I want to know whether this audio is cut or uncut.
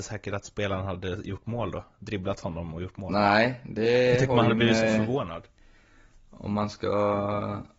uncut